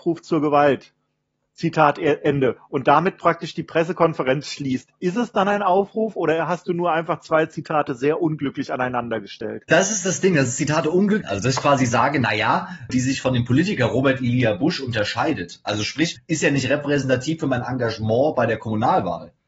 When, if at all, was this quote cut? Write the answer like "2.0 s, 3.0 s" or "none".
11.2 s, 12.9 s, 16.2 s